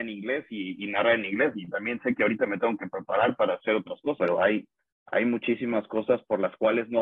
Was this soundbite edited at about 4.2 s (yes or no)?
yes